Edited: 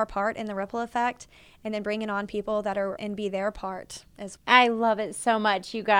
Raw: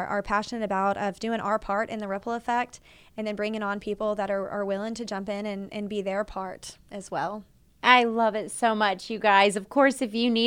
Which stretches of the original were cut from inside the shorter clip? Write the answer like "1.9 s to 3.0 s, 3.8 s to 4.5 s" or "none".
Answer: 4.5 s to 5.7 s, 7.1 s to 7.7 s